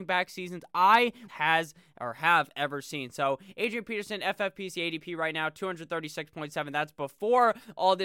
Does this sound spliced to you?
yes; 1 cut; at 1.3 s

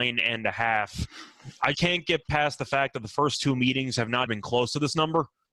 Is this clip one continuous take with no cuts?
no; 2 cuts; at 1.7 s, 4.3 s

